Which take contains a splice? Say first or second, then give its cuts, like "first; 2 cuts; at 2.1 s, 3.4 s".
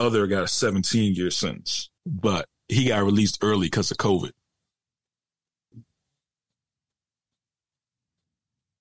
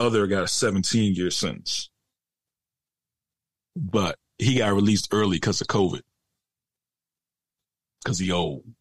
first; 2 cuts; at 2.0 s, 5.7 s